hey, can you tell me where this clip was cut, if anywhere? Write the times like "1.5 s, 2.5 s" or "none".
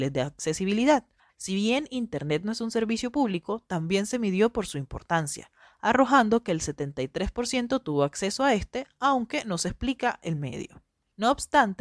1.3 s